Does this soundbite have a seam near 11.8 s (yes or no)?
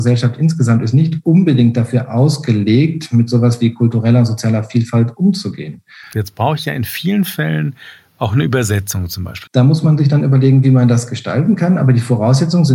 no